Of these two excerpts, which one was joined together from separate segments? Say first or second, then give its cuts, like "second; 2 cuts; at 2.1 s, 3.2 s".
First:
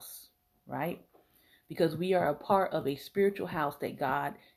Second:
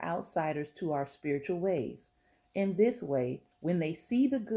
second; 1 cut; at 3.5 s